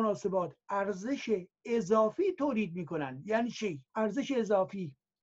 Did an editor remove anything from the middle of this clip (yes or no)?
yes